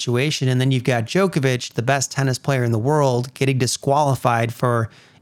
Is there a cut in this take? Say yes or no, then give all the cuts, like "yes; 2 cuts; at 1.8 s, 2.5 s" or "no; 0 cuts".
no; 0 cuts